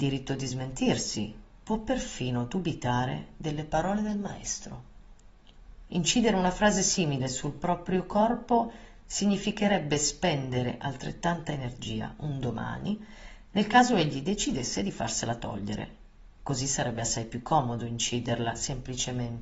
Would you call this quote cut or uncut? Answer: uncut